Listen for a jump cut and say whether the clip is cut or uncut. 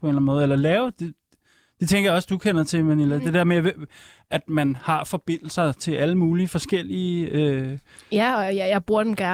uncut